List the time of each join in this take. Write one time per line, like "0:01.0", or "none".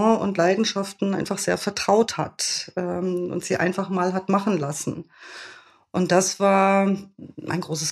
none